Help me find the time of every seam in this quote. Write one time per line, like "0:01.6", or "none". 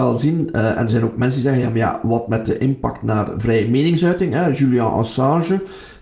none